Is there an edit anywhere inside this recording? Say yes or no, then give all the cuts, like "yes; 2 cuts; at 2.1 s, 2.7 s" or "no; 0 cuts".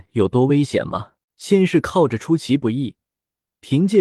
yes; 1 cut; at 1.2 s